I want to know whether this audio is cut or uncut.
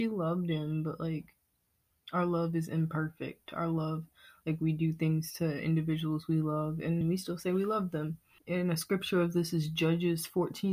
cut